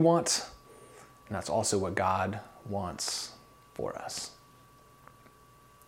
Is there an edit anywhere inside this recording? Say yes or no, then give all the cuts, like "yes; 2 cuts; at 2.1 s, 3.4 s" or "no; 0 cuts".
no; 0 cuts